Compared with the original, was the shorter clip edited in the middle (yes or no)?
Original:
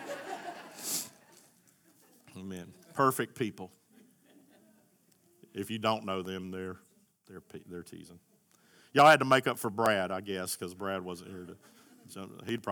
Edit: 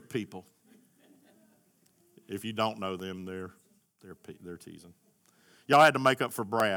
no